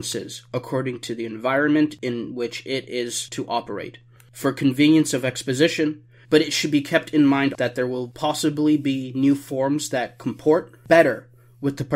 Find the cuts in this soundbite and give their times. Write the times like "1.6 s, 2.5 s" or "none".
6.2 s, 7.5 s